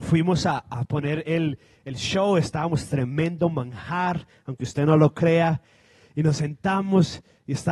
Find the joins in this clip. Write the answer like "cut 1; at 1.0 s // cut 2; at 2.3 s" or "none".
none